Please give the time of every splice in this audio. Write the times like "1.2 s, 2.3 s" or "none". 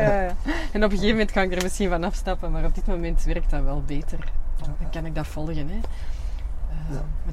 4.8 s